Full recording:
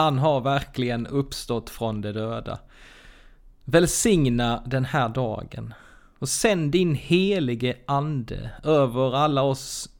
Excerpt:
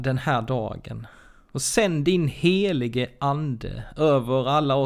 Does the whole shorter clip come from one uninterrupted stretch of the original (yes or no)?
yes